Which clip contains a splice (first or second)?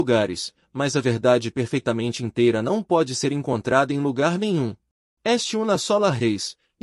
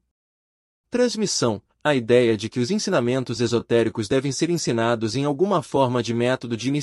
first